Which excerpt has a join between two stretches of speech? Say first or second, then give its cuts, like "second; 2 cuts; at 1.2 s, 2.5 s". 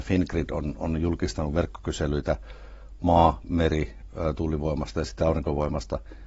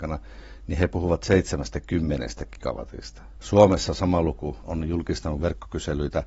second; 2 cuts; at 3.4 s, 4.6 s